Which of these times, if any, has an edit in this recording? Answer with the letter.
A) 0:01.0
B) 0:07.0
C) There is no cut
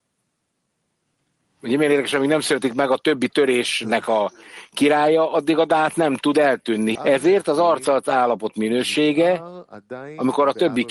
B